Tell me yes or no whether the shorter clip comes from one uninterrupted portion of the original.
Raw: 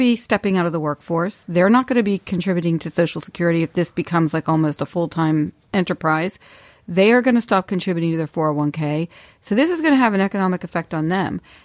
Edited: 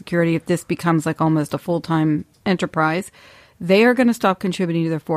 yes